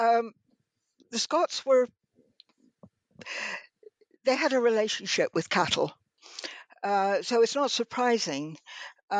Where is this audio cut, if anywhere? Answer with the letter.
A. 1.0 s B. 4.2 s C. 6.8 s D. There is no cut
D